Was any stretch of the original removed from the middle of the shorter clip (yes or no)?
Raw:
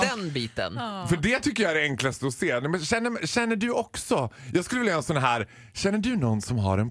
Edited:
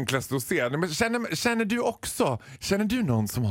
yes